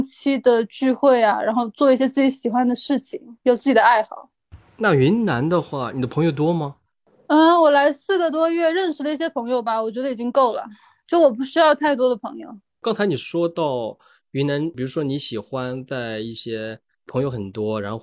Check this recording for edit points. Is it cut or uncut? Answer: uncut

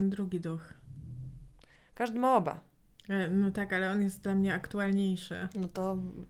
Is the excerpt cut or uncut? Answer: uncut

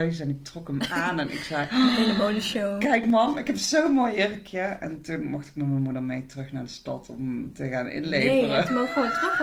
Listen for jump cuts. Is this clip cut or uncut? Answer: uncut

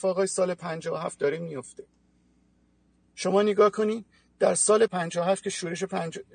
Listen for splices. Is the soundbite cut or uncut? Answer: cut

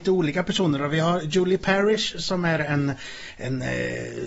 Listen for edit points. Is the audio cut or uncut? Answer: uncut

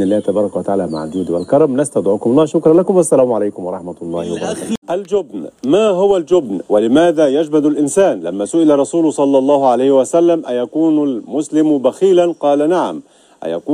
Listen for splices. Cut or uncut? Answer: cut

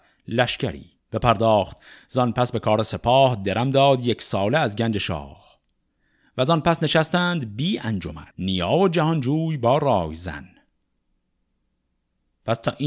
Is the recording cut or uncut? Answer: cut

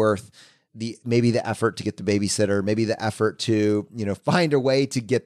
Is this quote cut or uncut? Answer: uncut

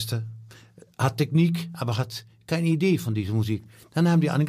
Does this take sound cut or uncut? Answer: uncut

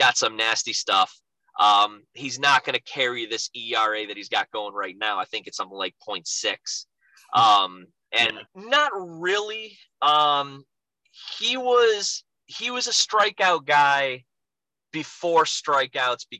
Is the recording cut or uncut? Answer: cut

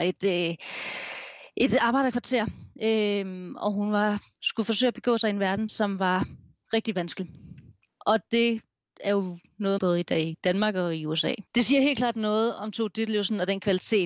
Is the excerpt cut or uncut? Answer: cut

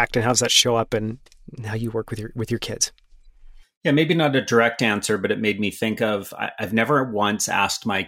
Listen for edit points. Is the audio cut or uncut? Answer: uncut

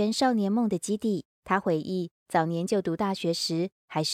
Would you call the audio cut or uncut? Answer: cut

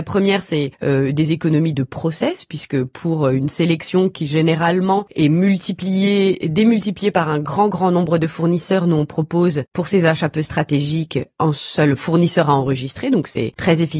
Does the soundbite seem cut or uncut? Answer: uncut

